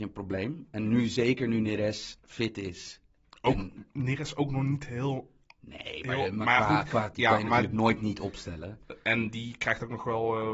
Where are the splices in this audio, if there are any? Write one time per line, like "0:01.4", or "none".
0:07.1